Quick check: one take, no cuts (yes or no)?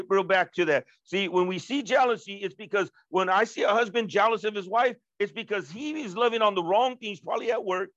yes